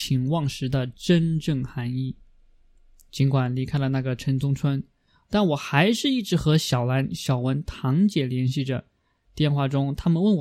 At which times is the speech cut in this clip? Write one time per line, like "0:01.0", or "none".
none